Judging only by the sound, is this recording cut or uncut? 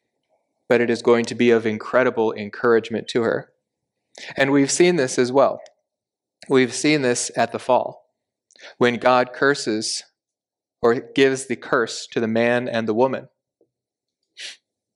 uncut